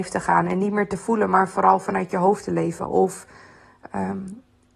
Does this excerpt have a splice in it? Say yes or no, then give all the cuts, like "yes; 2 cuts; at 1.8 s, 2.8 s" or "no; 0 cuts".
no; 0 cuts